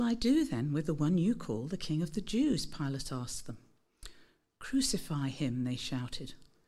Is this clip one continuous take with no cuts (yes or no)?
yes